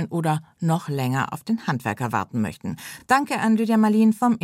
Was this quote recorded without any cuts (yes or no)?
yes